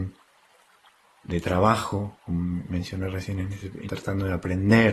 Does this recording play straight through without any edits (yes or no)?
no